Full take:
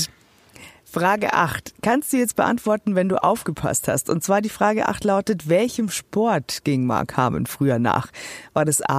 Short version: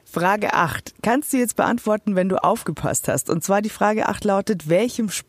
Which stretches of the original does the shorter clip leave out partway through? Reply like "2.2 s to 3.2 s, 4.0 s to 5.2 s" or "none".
none